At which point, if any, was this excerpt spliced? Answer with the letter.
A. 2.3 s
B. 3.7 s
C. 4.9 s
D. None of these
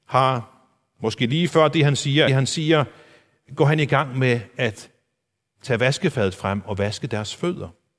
A